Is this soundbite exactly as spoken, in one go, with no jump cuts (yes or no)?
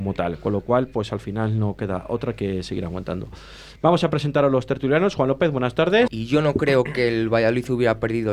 no